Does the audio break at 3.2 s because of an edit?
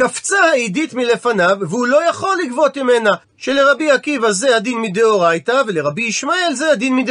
yes; 1 cut; at 3.2 s

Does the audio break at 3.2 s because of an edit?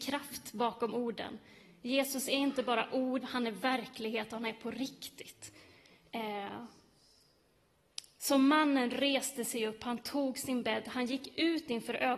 yes; 1 cut; at 3.2 s

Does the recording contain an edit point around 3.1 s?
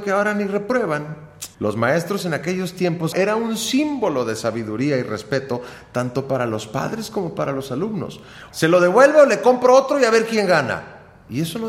yes; 3 cuts; at 1.5 s, 3.1 s, 8.5 s

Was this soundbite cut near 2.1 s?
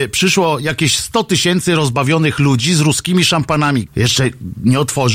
no; 1 cut; at 3.9 s

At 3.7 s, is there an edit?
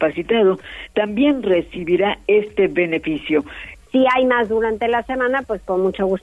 yes; 1 cut; at 3.7 s

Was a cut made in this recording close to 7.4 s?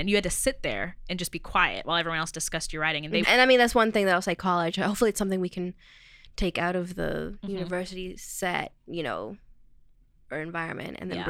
no; 1 cut; at 3.2 s

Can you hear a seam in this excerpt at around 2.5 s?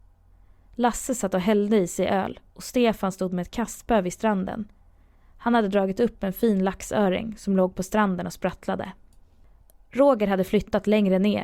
yes; 1 cut; at 2.5 s

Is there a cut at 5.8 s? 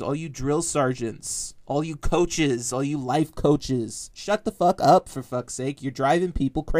no; 0 cuts

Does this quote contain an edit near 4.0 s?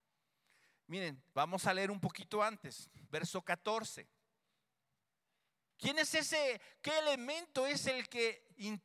no; 2 cuts; at 1.3 s, 5.7 s

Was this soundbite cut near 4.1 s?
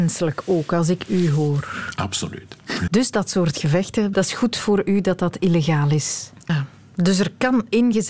yes; 3 cuts; at 2.9 s, 4.1 s, 6.5 s

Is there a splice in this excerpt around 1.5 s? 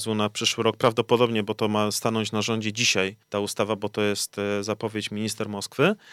no; 1 cut; at 3.2 s

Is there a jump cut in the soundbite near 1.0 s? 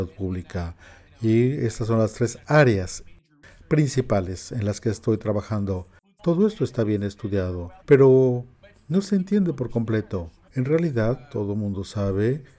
no; 3 cuts; at 6.2 s, 7.8 s, 10.5 s

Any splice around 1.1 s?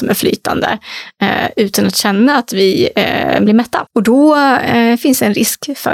no; 0 cuts

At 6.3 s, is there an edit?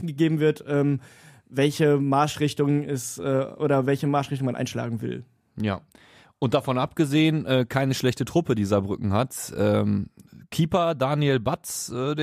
no; 0 cuts

